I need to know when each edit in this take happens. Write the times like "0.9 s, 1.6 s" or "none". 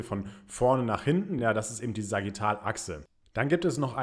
none